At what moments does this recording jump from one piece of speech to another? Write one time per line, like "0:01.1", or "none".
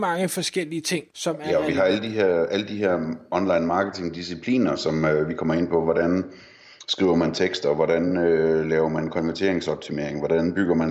0:01.1

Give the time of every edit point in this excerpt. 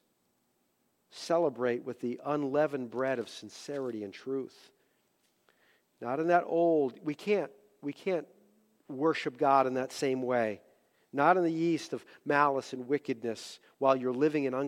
none

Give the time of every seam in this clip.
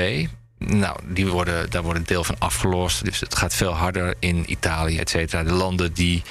0:03.0
0:05.0

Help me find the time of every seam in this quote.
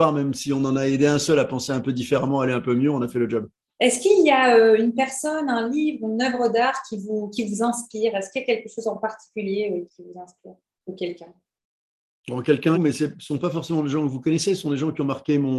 0:03.8
0:09.9
0:12.7

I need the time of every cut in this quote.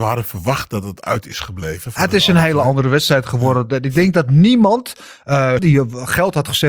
0:05.6

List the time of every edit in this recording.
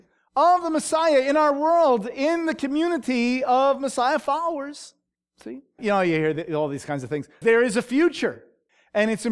0:05.8
0:07.4

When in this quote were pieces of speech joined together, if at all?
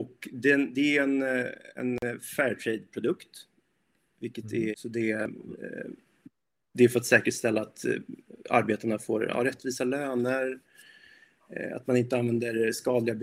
0:04.7

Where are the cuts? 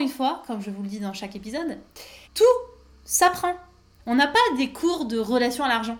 0:02.3
0:04.0

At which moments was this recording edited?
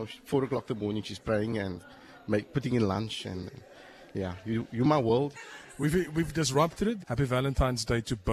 0:05.3
0:07.0

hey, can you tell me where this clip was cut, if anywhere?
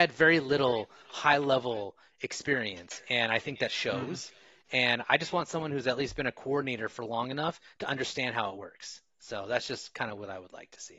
none

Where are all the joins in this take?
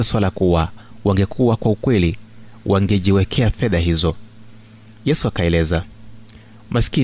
none

